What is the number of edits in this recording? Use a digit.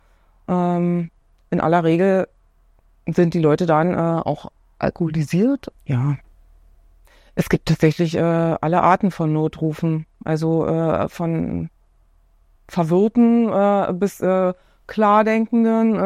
1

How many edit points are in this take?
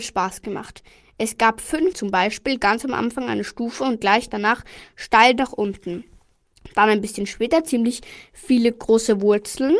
1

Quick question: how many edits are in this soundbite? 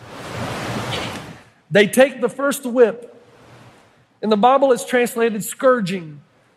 0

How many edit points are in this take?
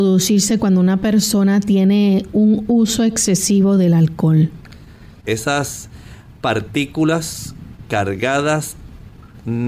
1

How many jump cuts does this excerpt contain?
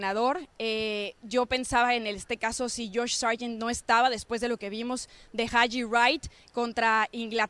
0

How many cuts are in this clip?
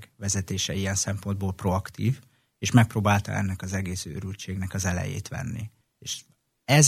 1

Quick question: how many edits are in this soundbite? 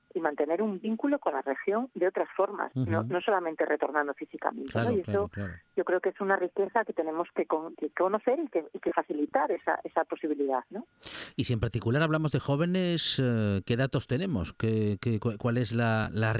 1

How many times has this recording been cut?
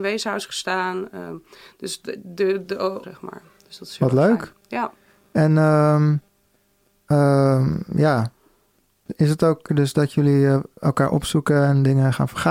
2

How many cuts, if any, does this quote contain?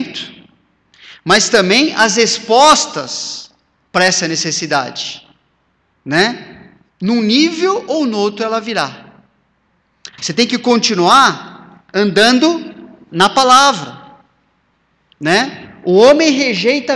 2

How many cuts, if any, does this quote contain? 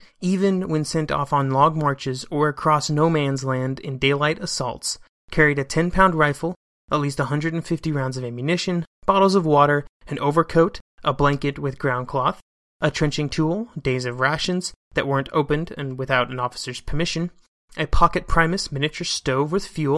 0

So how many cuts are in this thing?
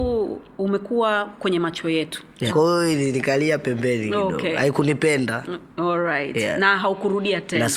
1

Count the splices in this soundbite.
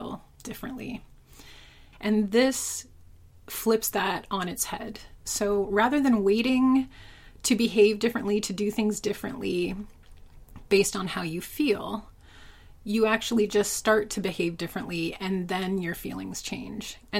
1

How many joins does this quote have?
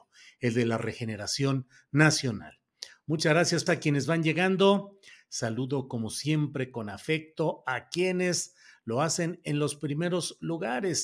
1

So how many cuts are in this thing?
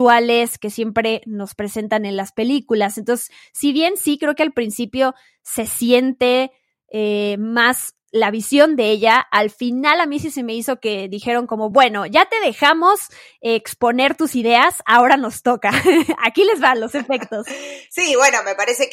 0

